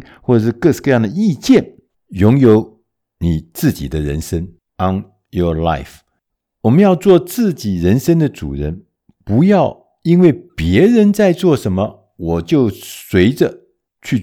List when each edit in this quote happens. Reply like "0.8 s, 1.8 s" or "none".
1.9 s